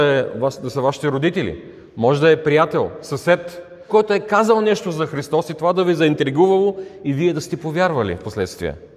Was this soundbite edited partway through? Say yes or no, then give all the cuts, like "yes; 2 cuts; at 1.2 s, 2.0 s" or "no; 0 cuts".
yes; 1 cut; at 3.9 s